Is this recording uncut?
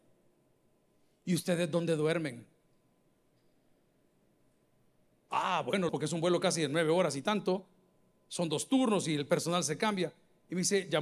no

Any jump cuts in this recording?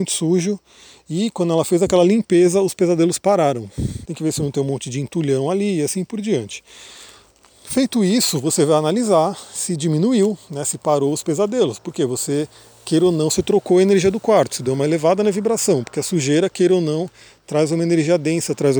yes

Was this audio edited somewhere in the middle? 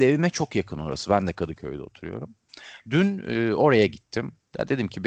no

